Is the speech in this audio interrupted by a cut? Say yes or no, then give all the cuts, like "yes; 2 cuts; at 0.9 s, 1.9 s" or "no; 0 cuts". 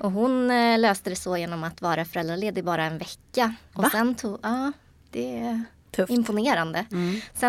no; 0 cuts